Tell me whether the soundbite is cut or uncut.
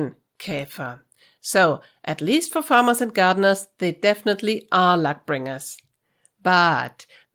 uncut